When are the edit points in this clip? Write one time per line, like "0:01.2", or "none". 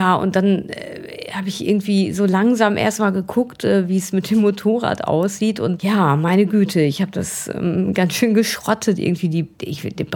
none